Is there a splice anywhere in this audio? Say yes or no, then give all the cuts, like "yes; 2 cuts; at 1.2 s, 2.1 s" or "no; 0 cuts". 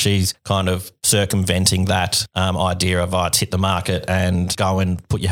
no; 0 cuts